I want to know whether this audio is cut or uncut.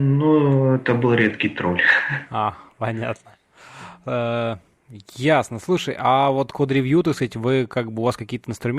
uncut